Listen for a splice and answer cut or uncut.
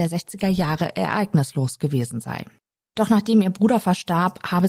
uncut